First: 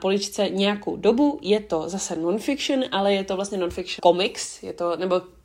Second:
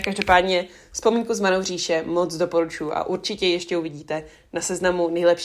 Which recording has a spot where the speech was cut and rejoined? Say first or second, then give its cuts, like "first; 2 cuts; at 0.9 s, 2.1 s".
first; 1 cut; at 4.0 s